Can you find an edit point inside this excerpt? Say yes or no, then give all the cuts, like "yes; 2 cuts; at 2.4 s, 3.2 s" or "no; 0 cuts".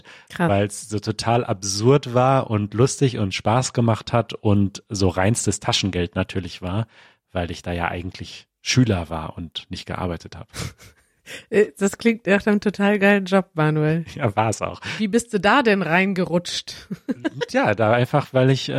no; 0 cuts